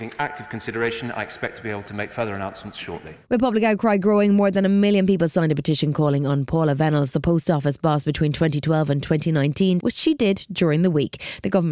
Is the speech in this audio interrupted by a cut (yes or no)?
yes